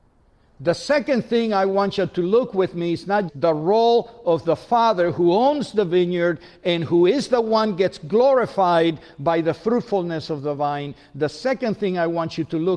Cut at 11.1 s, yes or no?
no